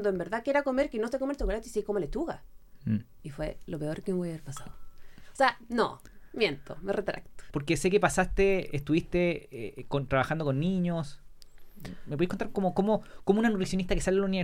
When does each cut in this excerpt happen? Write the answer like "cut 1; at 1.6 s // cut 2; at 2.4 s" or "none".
cut 1; at 3.2 s // cut 2; at 7.5 s